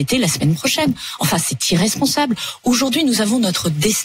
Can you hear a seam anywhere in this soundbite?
no; 0 cuts

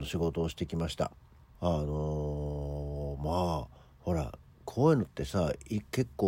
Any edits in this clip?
yes; 1 cut; at 1.5 s

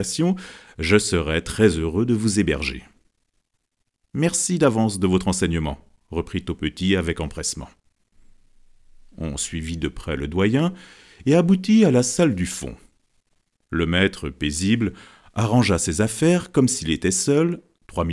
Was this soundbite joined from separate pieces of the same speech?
no; 0 cuts

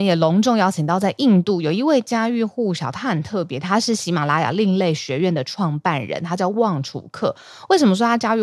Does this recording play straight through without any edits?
yes; 0 cuts

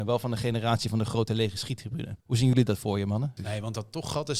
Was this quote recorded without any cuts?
no; 2 cuts; at 2.2 s, 3.4 s

